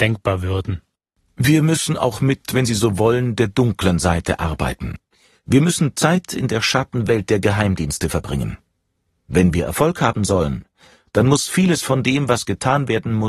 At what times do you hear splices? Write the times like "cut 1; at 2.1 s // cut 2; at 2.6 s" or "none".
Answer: none